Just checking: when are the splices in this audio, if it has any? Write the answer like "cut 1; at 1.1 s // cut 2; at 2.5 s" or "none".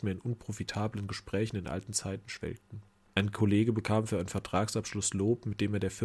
cut 1; at 3.1 s